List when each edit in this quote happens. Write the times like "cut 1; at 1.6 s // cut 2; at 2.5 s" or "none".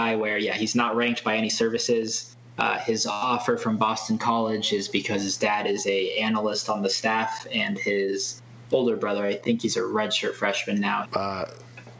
cut 1; at 11.0 s